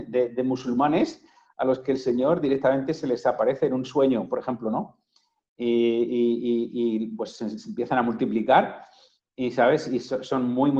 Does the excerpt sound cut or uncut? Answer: uncut